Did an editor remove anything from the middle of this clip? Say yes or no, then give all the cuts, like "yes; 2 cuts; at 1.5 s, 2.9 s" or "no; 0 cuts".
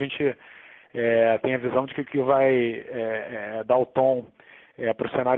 no; 0 cuts